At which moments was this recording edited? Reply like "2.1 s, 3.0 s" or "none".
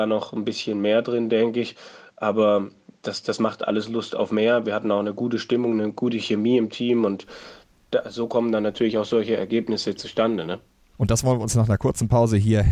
none